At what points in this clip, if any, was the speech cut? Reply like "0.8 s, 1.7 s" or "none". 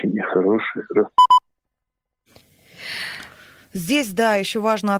none